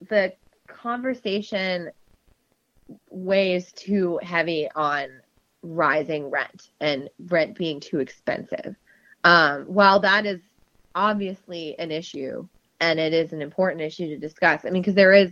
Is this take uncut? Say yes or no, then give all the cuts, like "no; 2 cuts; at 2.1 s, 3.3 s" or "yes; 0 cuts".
yes; 0 cuts